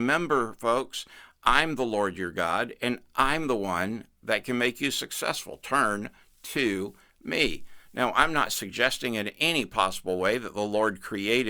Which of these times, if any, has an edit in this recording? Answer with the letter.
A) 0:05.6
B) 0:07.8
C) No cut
C